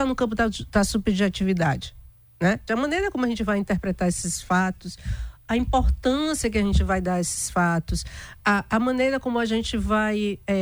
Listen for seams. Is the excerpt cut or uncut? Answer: cut